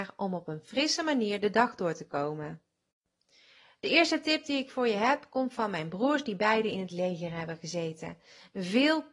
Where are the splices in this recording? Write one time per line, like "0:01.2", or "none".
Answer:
none